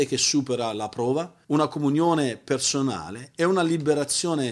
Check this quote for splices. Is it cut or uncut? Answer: cut